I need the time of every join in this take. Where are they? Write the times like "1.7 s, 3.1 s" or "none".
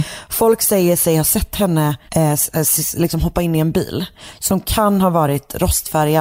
2.1 s